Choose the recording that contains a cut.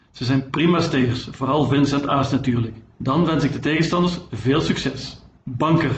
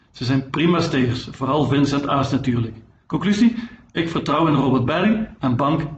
first; 1 cut; at 2.9 s

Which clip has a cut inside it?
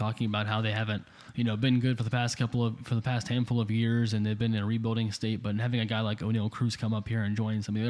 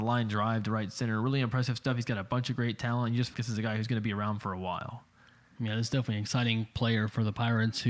second; 1 cut; at 3.3 s

